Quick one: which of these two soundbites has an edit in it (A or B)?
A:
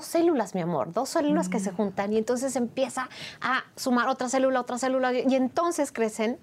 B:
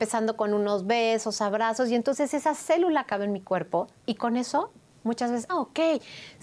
B